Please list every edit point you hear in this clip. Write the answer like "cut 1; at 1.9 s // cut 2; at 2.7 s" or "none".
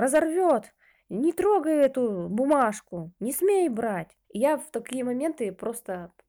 cut 1; at 4.2 s

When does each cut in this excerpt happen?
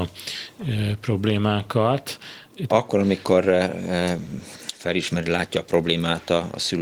cut 1; at 2.7 s

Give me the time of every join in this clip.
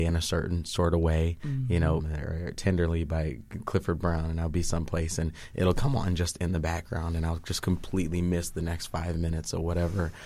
cut 1; at 2.0 s

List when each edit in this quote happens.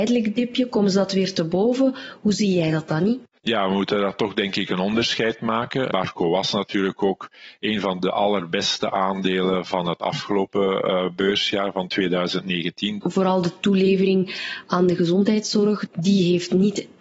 cut 1; at 5.9 s // cut 2; at 13.0 s // cut 3; at 15.9 s

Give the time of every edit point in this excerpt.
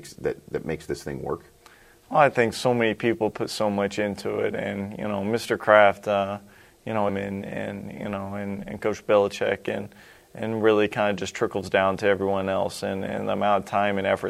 cut 1; at 7.1 s

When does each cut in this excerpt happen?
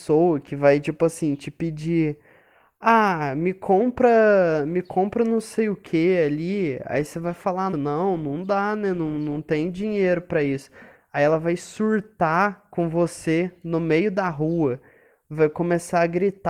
cut 1; at 7.7 s

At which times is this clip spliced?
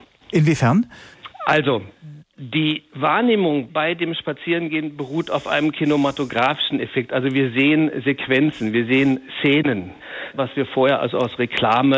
cut 1; at 10.4 s

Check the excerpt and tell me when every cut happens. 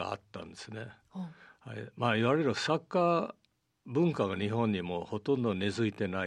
none

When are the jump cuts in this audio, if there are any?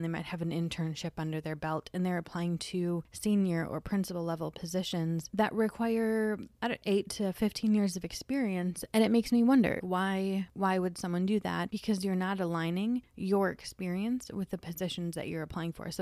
cut 1; at 9.8 s

